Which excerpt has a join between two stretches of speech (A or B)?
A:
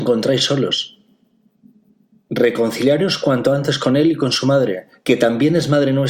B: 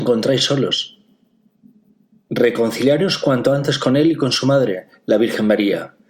A